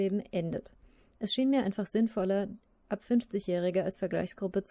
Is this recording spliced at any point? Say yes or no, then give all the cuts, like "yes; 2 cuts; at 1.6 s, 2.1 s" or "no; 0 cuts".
no; 0 cuts